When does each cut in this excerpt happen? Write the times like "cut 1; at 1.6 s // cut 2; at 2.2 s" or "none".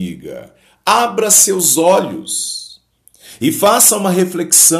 none